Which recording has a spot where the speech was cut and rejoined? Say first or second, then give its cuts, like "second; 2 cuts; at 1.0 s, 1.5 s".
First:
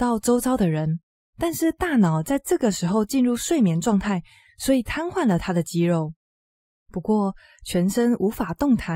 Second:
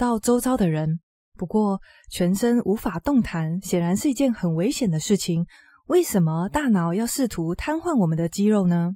second; 1 cut; at 1.2 s